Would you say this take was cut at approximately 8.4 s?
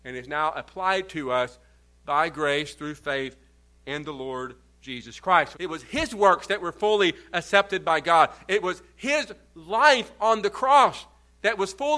no; 1 cut; at 5.5 s

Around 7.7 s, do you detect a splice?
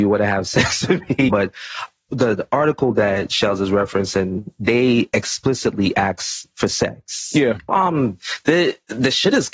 yes; 2 cuts; at 1.3 s, 7.7 s

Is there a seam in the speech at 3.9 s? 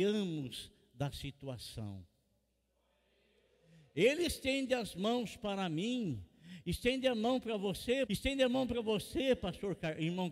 no; 1 cut; at 8.1 s

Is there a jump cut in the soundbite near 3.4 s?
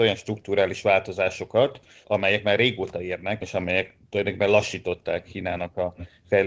yes; 2 cuts; at 2.0 s, 3.4 s

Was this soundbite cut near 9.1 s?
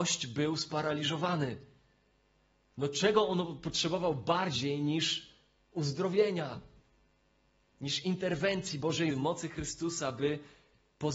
yes; 1 cut; at 9.1 s

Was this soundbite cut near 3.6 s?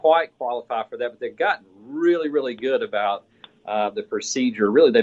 no; 0 cuts

